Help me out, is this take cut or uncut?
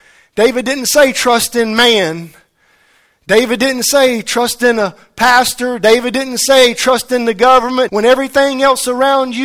cut